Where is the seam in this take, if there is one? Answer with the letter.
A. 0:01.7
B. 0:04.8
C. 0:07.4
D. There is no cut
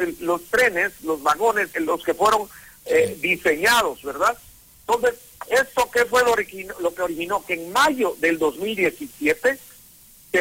A